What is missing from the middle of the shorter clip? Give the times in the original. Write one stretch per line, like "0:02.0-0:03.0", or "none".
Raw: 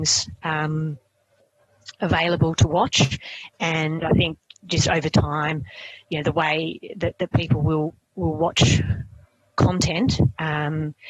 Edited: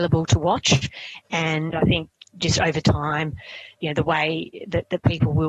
none